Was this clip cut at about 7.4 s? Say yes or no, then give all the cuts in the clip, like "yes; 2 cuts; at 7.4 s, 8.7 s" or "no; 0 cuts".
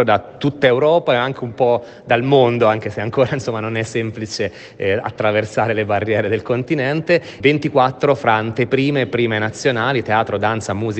yes; 1 cut; at 7.4 s